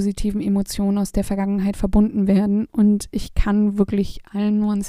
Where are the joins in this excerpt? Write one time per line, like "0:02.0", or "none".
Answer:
none